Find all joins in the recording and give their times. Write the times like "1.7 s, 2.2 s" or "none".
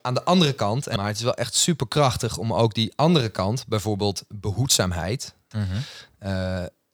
1.0 s, 5.5 s